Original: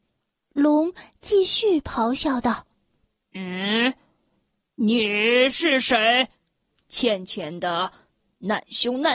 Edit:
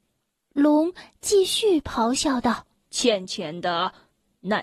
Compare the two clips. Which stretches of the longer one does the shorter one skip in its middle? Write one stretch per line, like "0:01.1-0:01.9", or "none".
0:02.8-0:06.8